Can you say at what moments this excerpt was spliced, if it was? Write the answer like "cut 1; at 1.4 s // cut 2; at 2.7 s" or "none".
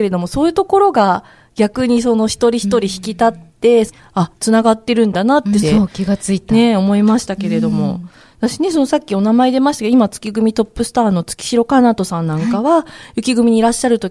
cut 1; at 3.9 s // cut 2; at 5.6 s